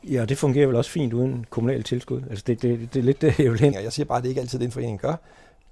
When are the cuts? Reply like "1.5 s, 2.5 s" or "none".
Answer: 3.7 s